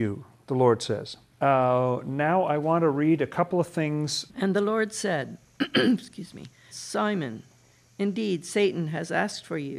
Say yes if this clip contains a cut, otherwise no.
yes